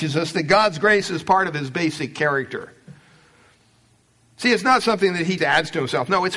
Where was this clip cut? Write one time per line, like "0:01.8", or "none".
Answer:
0:05.4